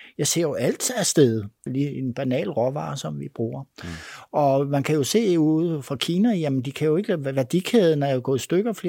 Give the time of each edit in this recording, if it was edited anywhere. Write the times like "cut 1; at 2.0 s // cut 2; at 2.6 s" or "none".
cut 1; at 1.7 s